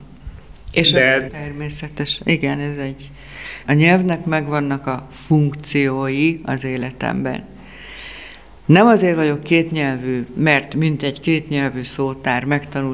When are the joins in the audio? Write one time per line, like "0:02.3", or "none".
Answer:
0:01.3
0:03.6